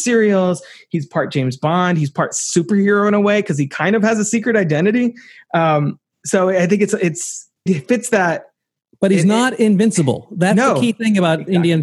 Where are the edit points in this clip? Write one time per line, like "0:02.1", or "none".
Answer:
0:07.7